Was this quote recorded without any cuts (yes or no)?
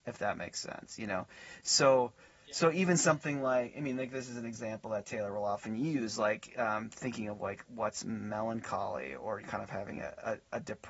no